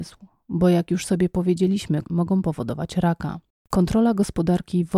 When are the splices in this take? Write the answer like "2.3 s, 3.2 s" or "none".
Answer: 2.0 s, 3.6 s